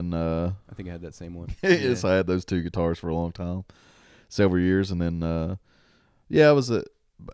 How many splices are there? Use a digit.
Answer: 1